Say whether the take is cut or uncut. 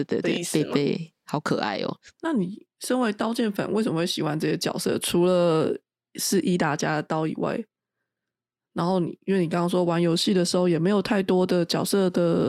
uncut